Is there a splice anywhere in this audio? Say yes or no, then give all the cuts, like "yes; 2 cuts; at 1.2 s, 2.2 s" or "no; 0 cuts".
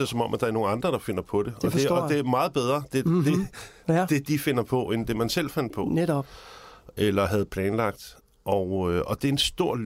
no; 0 cuts